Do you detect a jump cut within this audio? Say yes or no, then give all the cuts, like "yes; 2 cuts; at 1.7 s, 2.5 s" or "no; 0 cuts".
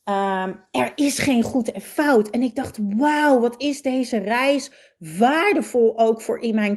no; 0 cuts